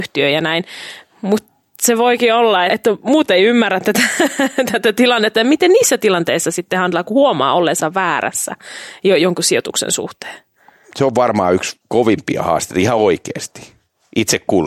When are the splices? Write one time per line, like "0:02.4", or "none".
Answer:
0:02.7